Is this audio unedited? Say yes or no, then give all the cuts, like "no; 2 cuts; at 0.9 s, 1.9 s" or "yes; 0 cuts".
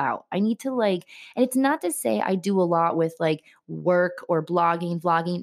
yes; 0 cuts